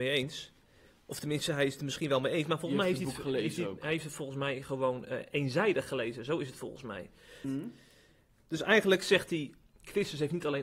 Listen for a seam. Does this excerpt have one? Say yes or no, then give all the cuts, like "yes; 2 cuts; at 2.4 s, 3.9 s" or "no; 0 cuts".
yes; 1 cut; at 7.4 s